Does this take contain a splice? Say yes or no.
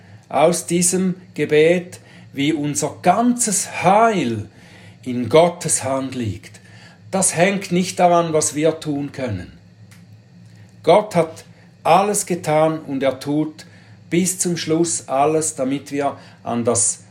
no